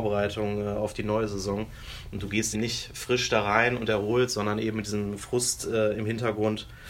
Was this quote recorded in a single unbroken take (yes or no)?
no